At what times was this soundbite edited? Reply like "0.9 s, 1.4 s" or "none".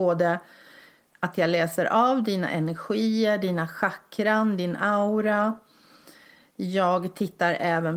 none